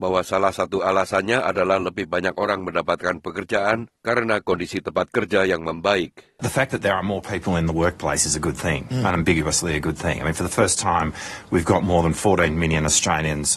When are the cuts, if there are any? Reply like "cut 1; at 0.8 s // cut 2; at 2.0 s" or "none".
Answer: none